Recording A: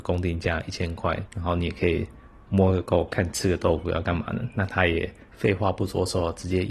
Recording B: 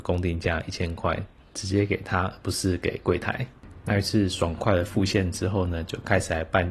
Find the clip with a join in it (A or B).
A